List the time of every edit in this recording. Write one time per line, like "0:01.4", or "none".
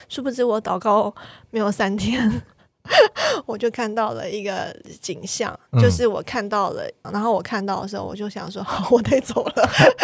0:07.0